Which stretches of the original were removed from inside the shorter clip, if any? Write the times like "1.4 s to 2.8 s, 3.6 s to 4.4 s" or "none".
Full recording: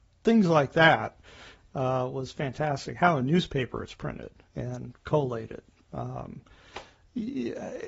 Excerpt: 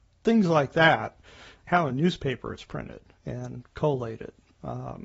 1.7 s to 3.0 s